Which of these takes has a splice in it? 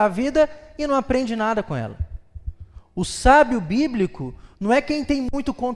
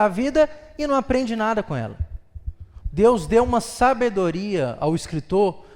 second; 1 cut; at 2.8 s

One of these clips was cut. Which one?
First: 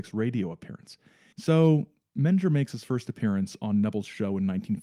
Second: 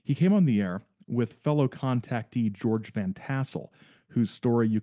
first; 1 cut; at 1.3 s

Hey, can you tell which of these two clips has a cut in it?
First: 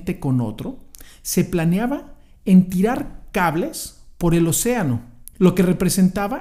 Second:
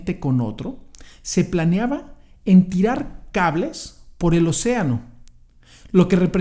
first; 1 cut; at 5.3 s

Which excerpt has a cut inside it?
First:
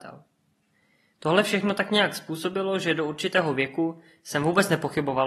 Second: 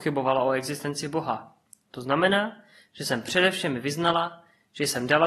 second; 1 cut; at 1.7 s

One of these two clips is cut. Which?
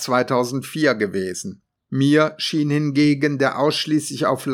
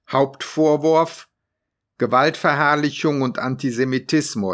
first; 1 cut; at 1.8 s

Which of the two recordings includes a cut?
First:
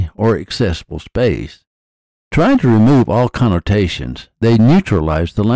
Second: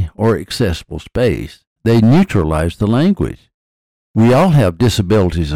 second; 1 cut; at 1.8 s

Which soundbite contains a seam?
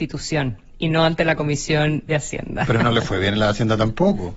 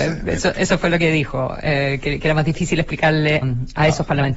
second; 1 cut; at 3.4 s

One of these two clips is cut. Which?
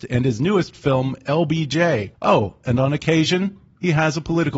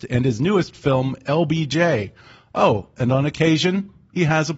first; 1 cut; at 2.1 s

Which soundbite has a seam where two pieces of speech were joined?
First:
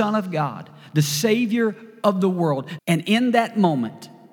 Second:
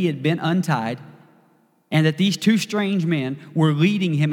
first; 1 cut; at 2.8 s

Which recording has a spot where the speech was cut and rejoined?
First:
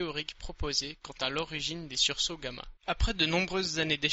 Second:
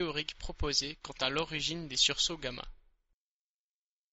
first; 1 cut; at 2.8 s

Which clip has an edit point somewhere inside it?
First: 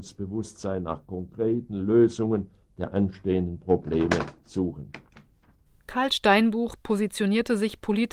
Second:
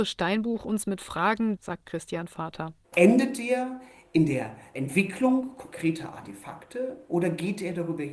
second; 2 cuts; at 1.6 s, 2.8 s

